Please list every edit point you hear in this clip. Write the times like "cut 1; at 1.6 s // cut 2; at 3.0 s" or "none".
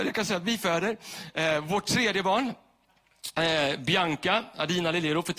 none